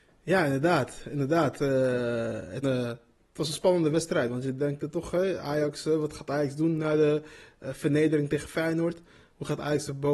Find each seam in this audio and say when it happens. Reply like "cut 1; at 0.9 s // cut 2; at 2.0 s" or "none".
cut 1; at 2.6 s